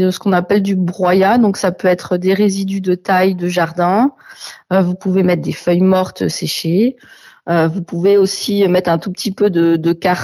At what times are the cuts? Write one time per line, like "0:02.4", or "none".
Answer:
none